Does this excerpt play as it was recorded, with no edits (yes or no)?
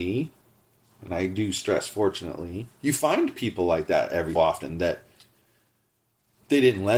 no